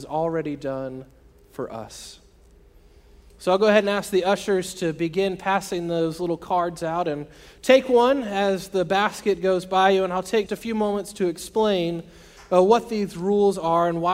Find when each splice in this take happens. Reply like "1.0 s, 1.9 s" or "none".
3.3 s, 10.5 s